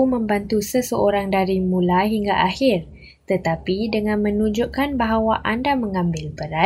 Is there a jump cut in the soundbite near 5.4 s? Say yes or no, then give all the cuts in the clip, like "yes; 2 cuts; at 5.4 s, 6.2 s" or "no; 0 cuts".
no; 0 cuts